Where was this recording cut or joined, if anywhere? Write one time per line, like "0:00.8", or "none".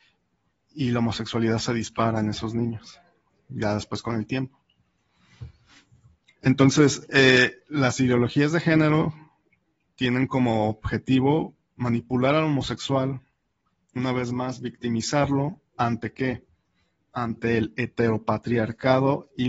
none